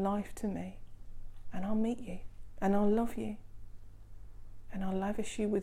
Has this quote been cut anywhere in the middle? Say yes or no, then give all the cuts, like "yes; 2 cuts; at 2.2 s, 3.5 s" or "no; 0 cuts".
yes; 1 cut; at 2.6 s